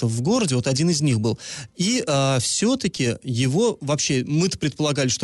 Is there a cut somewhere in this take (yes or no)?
no